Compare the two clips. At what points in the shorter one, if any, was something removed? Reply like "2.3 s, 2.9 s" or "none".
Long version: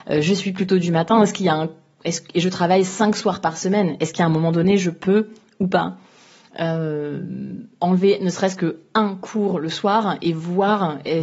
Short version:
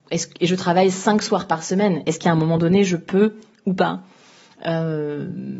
none